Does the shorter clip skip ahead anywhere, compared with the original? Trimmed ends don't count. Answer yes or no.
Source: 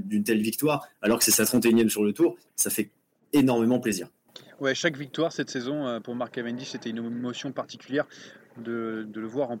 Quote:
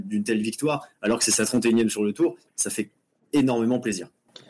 no